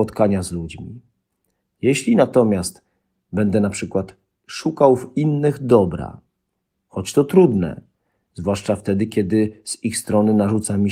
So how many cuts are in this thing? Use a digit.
0